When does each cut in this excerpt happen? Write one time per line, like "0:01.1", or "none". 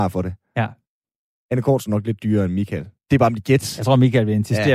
none